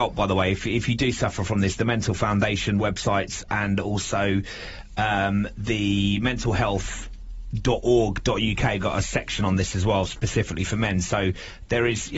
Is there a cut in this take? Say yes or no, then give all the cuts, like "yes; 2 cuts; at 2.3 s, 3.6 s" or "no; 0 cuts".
no; 0 cuts